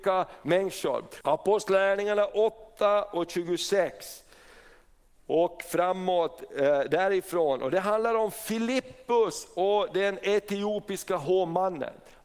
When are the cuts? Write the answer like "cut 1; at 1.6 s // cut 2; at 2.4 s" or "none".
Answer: cut 1; at 1.2 s